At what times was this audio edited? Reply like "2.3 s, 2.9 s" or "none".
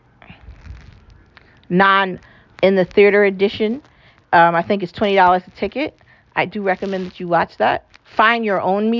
7.9 s